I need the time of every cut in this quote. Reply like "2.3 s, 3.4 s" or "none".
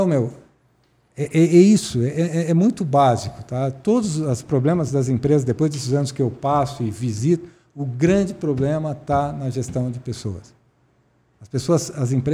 none